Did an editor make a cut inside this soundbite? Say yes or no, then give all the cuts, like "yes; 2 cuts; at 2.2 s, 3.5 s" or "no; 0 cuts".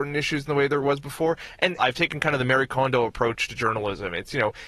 yes; 1 cut; at 1.8 s